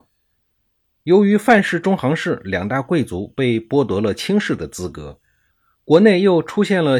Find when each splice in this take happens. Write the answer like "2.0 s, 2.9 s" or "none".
none